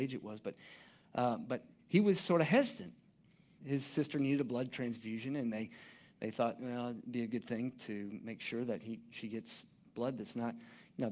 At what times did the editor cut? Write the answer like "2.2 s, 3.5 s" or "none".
3.6 s